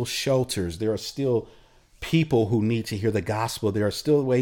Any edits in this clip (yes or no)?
no